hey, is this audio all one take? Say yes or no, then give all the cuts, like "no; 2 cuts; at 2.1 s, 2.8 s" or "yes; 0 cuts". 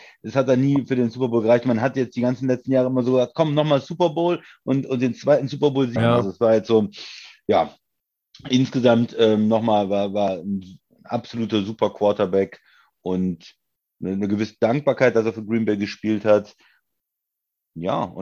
no; 1 cut; at 6.0 s